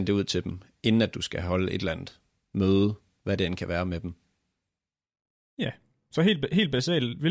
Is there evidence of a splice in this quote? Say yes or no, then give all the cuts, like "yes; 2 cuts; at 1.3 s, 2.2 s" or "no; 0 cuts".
no; 0 cuts